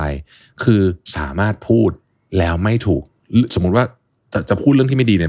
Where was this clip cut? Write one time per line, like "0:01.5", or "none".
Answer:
none